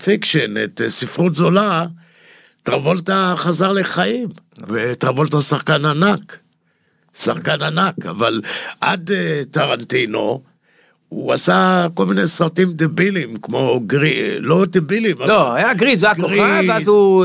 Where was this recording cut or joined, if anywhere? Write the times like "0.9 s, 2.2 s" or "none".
none